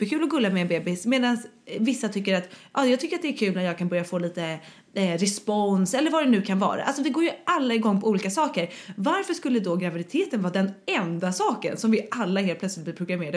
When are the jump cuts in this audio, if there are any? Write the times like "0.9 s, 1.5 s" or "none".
none